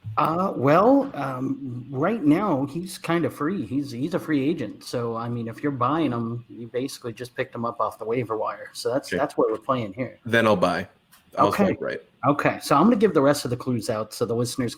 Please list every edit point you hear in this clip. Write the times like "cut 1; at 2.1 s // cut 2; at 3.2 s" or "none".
none